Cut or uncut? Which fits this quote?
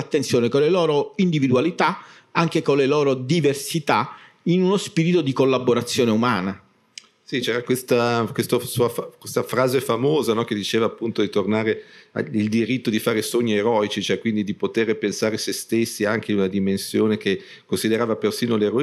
uncut